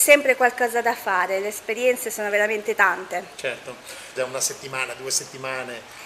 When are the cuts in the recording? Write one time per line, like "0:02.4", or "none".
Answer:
0:04.2